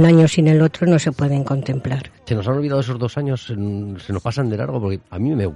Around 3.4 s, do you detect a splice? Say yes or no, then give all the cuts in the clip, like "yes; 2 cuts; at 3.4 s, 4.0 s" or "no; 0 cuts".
no; 1 cut; at 2.2 s